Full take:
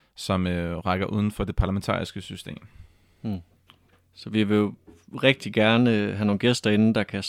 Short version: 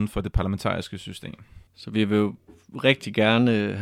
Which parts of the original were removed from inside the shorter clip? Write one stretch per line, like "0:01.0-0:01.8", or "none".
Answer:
0:02.9-0:04.1